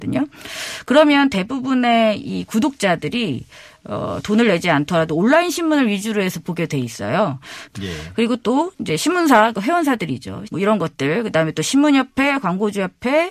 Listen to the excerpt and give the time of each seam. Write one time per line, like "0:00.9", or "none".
0:07.7
0:10.5